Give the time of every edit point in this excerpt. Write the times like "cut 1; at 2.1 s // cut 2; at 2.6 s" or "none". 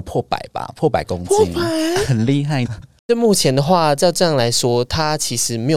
cut 1; at 2.7 s